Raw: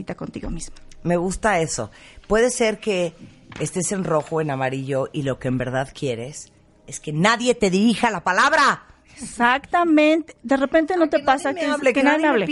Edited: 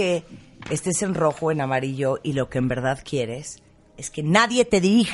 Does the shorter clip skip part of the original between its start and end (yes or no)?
no